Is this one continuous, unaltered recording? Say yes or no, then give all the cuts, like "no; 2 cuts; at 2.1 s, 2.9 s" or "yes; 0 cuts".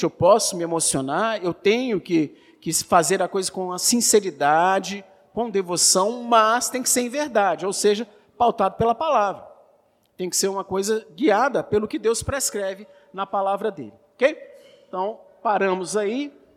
yes; 0 cuts